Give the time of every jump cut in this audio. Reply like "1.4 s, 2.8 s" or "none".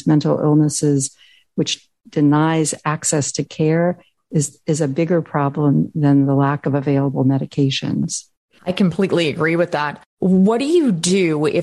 none